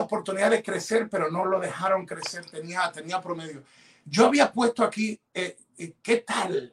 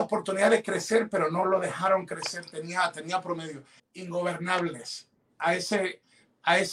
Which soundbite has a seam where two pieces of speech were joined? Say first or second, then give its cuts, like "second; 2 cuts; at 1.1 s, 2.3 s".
second; 1 cut; at 3.8 s